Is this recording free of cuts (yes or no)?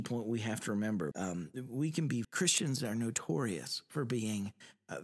no